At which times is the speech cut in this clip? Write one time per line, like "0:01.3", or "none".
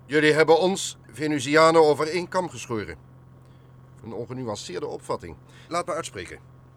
0:04.0
0:05.7